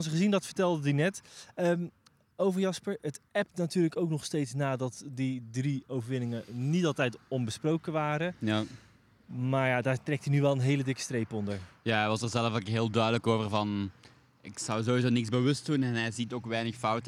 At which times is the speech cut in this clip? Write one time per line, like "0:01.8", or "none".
none